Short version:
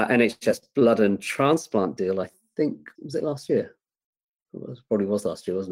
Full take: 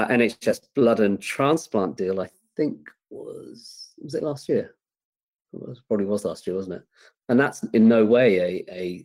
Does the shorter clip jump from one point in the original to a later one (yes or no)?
yes